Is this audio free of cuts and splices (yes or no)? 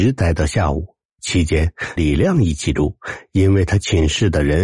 no